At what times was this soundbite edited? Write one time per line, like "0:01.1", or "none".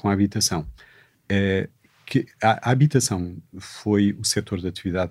none